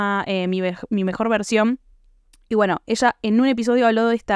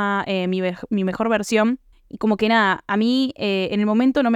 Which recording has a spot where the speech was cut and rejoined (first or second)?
second